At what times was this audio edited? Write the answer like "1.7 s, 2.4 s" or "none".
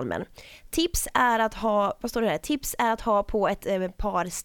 2.0 s